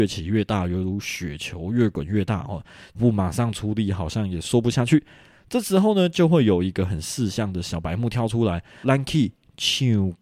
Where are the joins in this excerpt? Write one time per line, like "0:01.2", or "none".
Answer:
0:02.9
0:08.8